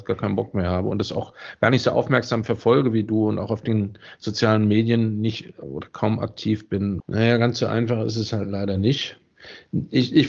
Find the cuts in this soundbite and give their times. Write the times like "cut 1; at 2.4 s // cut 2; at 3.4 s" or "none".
cut 1; at 7.0 s